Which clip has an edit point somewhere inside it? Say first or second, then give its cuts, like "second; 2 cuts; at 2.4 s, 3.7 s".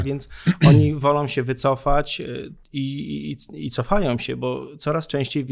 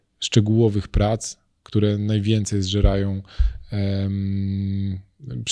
first; 1 cut; at 2.6 s